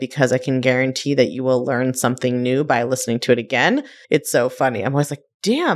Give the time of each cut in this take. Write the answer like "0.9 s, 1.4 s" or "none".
4.0 s